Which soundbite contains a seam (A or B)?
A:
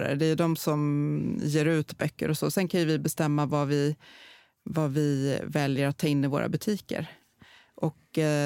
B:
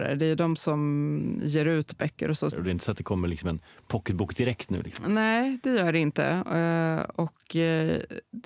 B